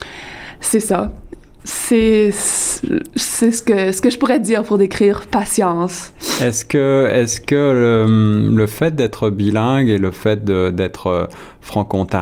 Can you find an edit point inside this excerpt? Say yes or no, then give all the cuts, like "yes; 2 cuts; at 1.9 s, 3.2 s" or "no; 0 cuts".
no; 0 cuts